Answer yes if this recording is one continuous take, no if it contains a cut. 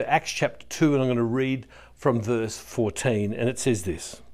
yes